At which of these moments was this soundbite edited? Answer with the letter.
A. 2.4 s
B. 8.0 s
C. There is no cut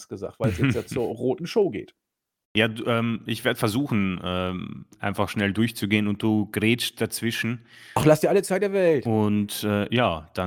C